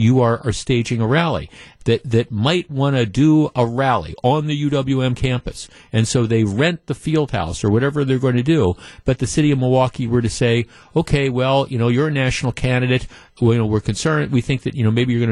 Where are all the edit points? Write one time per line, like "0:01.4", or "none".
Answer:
0:01.8

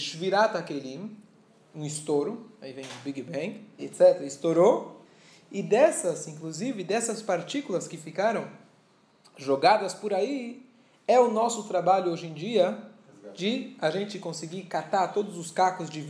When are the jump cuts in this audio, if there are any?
none

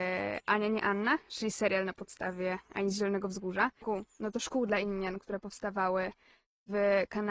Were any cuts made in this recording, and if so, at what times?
0:03.8

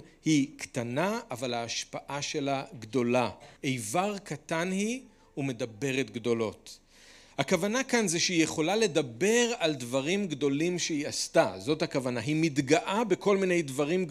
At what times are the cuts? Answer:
0:03.6

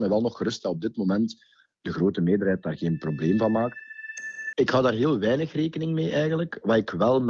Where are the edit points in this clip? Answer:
0:04.5

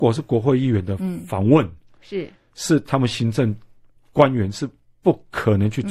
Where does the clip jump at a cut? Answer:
none

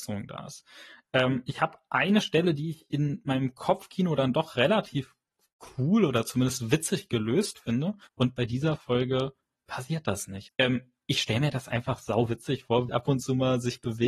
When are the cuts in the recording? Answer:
0:08.1
0:10.5
0:12.9

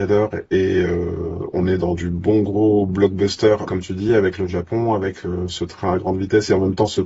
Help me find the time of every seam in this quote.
0:03.7

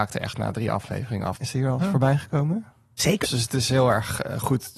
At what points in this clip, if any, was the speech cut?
0:01.4
0:03.2

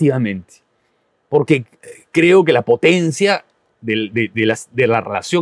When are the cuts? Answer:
0:04.3

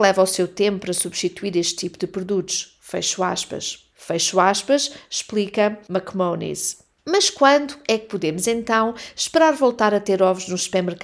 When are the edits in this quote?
0:03.9

